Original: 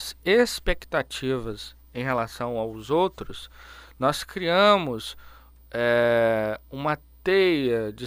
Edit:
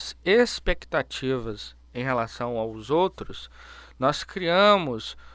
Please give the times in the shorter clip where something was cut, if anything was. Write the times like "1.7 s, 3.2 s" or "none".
none